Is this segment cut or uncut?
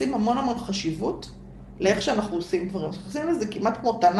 uncut